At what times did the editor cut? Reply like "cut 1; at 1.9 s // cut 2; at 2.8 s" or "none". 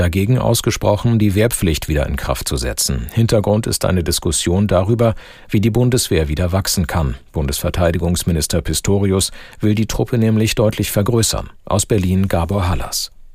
none